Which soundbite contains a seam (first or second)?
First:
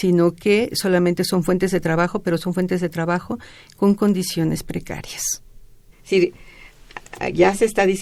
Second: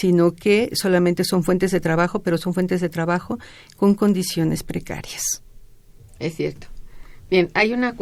first